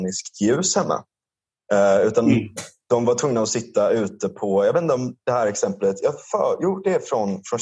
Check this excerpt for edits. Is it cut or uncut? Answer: uncut